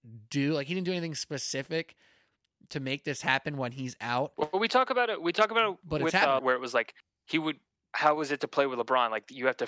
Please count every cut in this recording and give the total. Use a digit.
1